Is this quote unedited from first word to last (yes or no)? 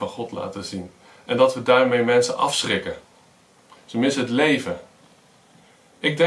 no